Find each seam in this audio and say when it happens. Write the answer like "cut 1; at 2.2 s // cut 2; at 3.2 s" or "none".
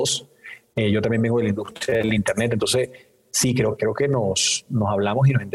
cut 1; at 3.8 s